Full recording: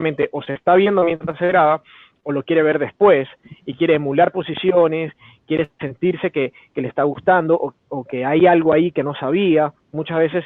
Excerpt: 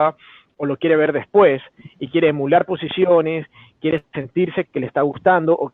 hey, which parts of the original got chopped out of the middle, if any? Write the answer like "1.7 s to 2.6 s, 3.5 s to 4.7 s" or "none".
6.3 s to 6.7 s